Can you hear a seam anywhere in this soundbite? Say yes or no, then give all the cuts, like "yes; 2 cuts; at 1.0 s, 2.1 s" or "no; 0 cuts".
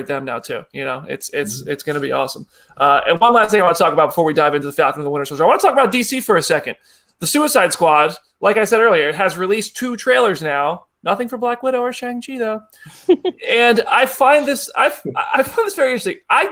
no; 0 cuts